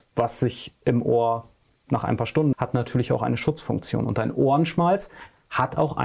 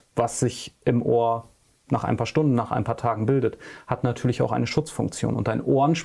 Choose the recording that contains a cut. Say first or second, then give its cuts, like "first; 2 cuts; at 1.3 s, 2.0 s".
first; 1 cut; at 2.5 s